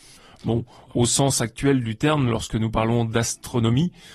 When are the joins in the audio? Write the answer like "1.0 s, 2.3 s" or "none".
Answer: none